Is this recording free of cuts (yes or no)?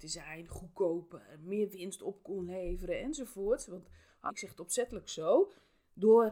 no